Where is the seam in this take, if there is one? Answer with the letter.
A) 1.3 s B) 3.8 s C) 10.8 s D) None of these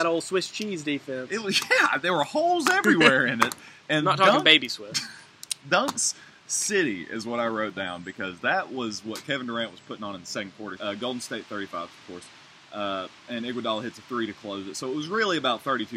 C